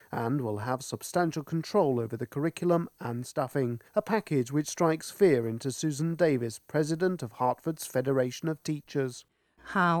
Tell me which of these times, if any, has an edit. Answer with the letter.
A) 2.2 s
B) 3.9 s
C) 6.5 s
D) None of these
B